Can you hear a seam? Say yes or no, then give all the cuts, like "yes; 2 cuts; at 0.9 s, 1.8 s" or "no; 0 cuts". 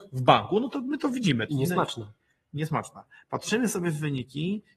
yes; 1 cut; at 1.5 s